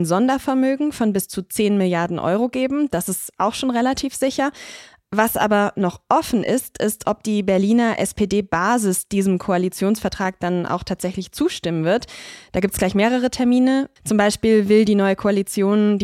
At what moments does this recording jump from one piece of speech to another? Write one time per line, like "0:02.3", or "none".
0:12.4
0:14.0

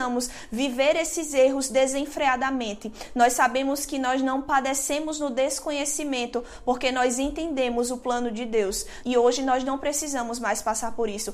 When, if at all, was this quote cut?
0:09.0

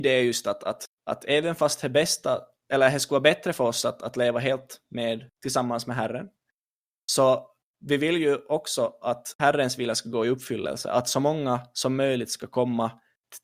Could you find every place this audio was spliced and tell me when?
none

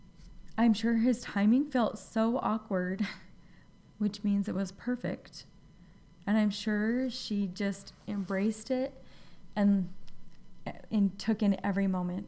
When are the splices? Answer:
0:03.8

